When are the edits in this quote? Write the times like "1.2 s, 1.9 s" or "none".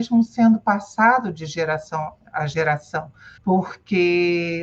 3.4 s